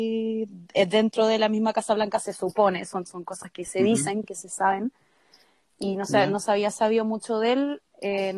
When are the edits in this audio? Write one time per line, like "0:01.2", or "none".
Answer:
none